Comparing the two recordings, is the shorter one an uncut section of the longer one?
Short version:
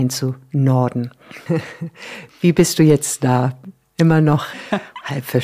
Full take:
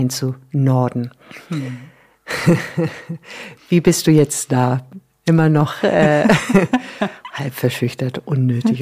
no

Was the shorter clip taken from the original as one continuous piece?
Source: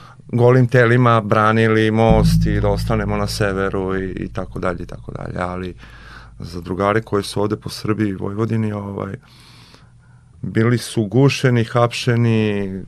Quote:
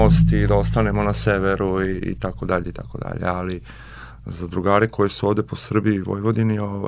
yes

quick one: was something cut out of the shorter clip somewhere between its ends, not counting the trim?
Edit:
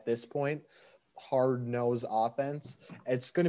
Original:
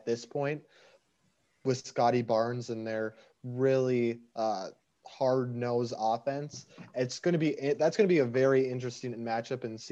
yes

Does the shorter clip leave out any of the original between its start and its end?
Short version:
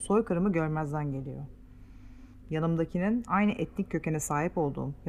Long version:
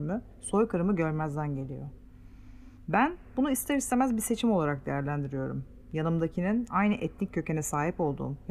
yes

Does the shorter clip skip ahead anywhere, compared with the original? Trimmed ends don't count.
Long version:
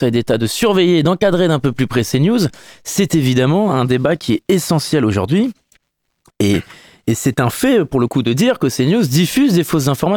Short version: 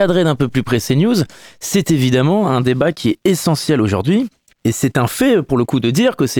yes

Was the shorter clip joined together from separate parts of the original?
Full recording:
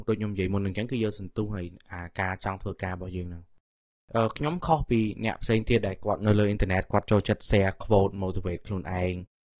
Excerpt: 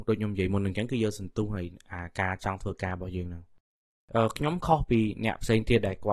no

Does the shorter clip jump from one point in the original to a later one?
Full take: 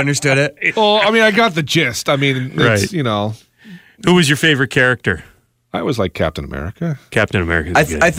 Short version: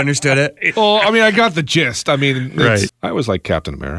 yes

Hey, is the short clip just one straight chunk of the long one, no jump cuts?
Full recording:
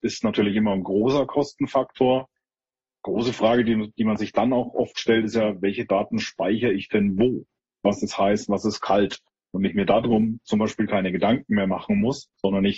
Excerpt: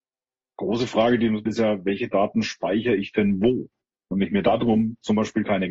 no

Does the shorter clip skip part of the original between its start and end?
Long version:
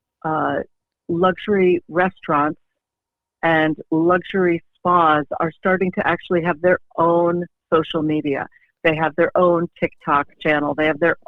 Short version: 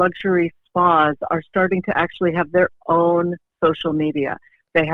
no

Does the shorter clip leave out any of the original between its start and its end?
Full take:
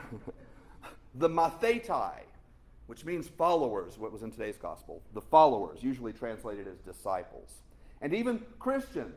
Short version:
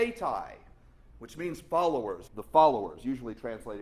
yes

